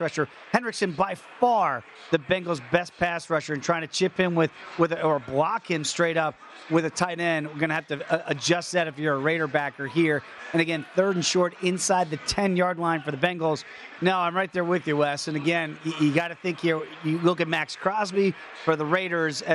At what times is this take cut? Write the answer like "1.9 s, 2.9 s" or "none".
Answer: 14.0 s